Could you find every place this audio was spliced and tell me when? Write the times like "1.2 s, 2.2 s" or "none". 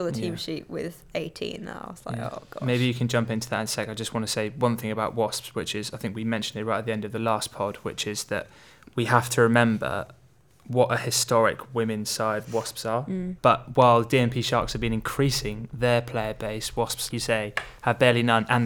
13.4 s, 17.1 s